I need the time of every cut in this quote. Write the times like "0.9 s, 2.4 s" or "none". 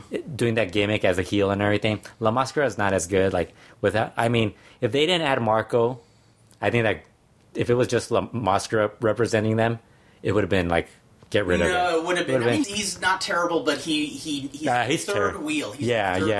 12.6 s